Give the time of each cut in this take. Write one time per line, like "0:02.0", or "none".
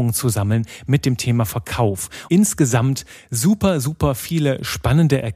0:02.3